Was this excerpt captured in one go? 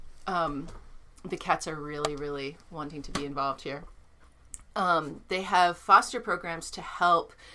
yes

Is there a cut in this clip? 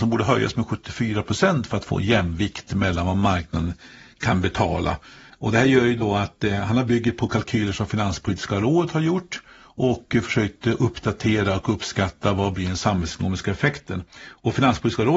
yes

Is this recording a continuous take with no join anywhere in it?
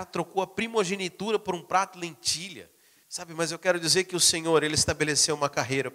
no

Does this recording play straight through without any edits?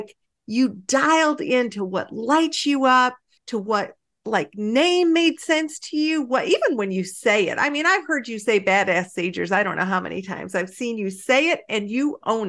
yes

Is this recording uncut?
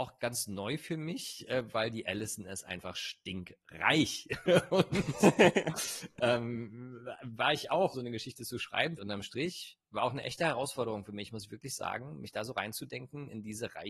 no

